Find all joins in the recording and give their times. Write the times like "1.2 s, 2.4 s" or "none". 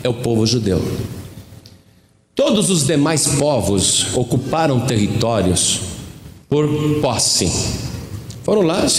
6.4 s